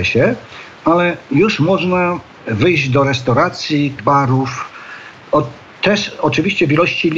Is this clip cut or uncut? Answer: cut